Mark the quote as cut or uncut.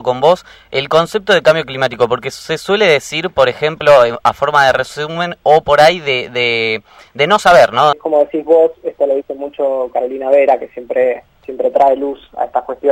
cut